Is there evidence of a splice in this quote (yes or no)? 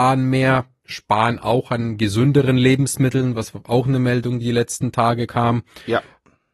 yes